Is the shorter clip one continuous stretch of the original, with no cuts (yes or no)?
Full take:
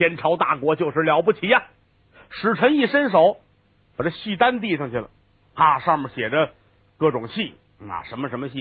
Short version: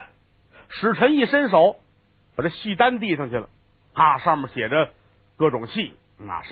yes